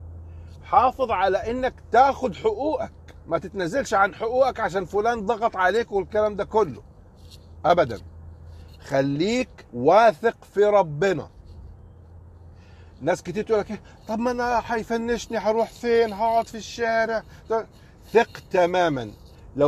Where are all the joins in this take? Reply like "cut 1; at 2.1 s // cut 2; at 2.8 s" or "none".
cut 1; at 9.7 s